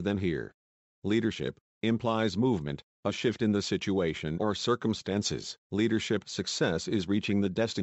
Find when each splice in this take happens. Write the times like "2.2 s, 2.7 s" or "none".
1.7 s, 5.6 s